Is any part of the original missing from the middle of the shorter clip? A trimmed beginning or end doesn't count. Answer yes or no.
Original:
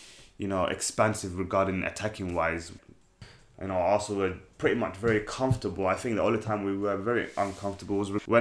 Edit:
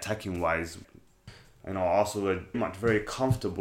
yes